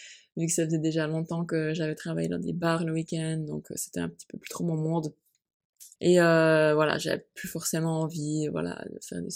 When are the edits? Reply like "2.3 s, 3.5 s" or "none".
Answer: 6.0 s